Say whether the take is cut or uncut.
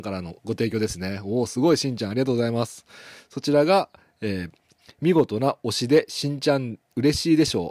uncut